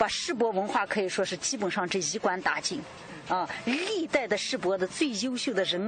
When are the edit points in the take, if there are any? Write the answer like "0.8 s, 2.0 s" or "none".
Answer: none